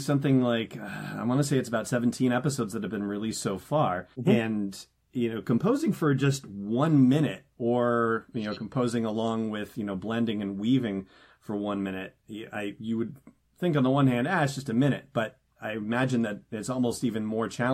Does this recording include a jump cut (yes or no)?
yes